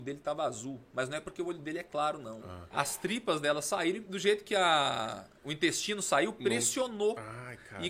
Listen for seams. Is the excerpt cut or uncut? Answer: cut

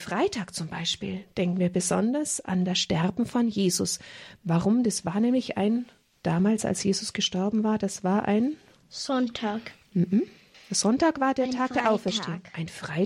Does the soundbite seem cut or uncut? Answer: uncut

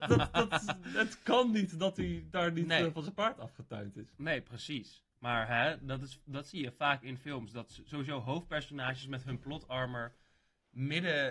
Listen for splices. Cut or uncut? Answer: uncut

